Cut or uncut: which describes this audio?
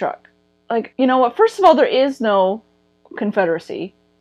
cut